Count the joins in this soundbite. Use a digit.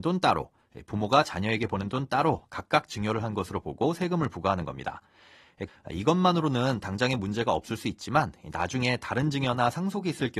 1